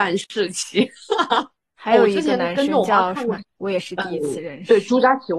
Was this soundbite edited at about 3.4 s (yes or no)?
yes